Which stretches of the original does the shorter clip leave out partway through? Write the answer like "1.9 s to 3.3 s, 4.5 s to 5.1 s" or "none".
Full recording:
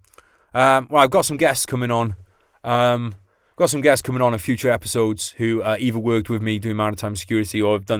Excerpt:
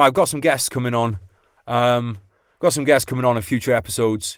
none